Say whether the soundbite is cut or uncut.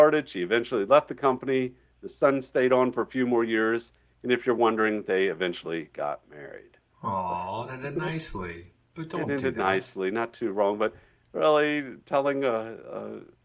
uncut